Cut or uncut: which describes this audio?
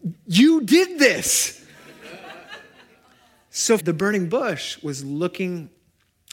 cut